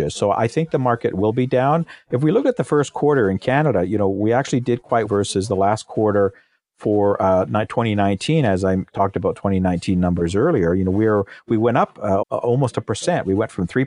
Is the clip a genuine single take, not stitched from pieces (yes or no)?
no